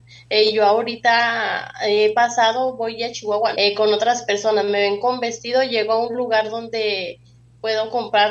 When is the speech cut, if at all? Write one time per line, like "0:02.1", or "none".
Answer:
0:03.5